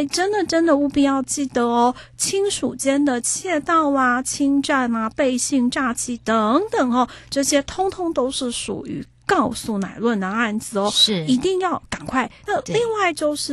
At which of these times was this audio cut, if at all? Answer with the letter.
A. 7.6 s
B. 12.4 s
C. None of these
B